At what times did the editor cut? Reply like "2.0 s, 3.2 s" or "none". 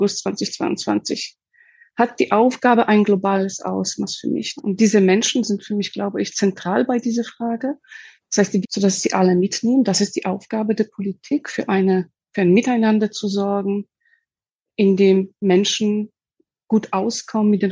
4.6 s, 8.6 s